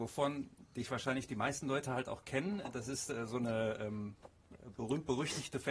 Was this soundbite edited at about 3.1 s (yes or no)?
no